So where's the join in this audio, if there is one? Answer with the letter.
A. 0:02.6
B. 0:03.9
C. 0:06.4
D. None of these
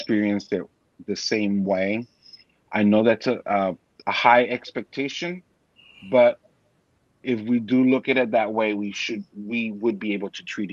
D